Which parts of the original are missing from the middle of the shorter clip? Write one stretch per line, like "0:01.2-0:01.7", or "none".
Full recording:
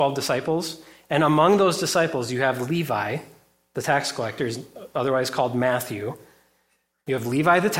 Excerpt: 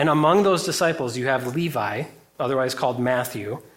0:03.5-0:04.9

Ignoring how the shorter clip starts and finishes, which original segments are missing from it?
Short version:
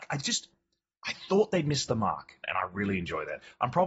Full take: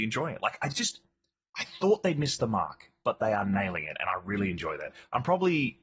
0:02.9-0:03.9

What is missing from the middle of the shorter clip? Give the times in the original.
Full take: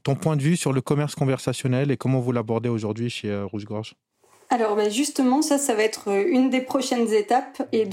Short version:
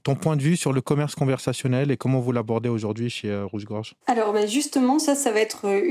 0:04.0-0:04.4

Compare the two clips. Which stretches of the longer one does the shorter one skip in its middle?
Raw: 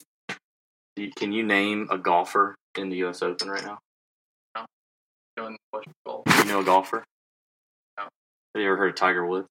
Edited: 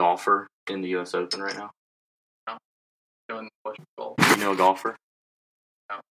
none

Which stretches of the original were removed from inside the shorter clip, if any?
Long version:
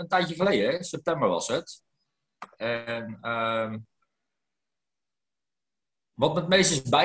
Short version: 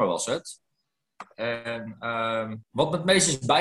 0:03.9-0:06.1

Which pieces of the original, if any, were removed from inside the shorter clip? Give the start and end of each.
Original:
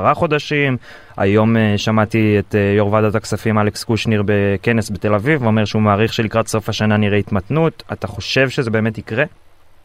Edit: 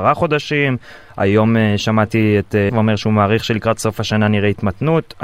0:02.7-0:05.4

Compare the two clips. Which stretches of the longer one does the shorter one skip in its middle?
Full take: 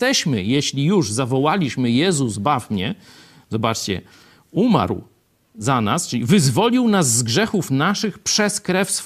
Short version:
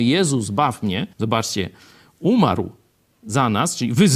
0:03.0-0:03.4

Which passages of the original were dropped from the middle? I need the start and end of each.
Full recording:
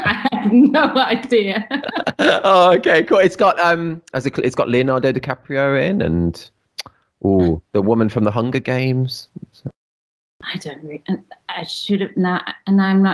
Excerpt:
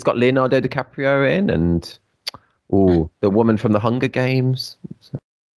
none

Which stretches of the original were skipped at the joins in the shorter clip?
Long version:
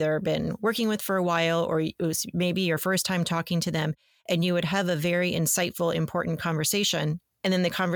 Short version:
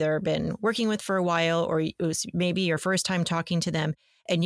none

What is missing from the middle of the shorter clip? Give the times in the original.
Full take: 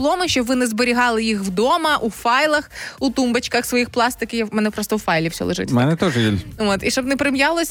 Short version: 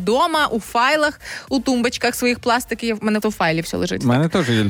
0:04.7-0:04.9

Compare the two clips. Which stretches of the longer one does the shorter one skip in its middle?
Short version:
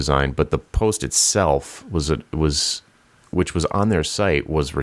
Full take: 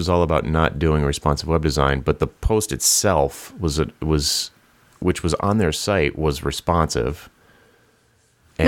none

